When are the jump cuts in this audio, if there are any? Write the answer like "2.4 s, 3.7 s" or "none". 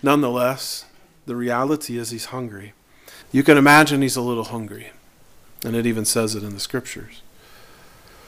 3.2 s